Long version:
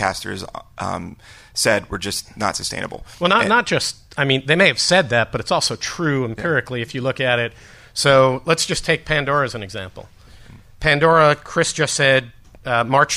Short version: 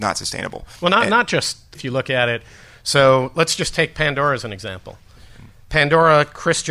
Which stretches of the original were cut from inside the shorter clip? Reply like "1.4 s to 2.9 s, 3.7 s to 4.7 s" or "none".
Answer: 4.1 s to 6.9 s